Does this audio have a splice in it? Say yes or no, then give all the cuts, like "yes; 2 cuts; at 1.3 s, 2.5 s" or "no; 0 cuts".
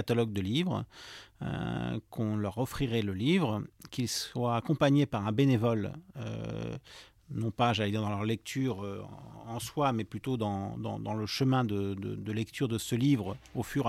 no; 0 cuts